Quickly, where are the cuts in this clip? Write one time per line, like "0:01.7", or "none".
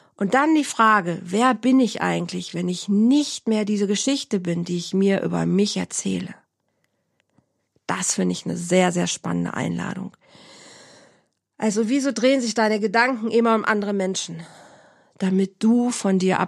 none